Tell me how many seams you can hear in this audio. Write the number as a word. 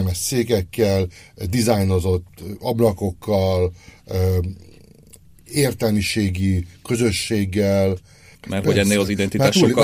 one